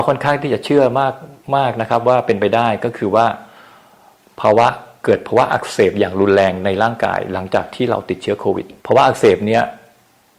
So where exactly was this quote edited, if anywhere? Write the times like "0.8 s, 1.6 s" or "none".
8.8 s